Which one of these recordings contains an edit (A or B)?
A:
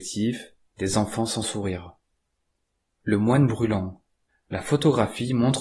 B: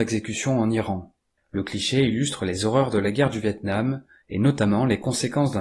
B